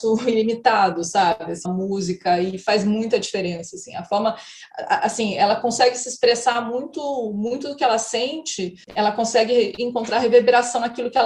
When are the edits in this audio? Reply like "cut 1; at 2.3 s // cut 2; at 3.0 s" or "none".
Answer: cut 1; at 1.6 s // cut 2; at 8.8 s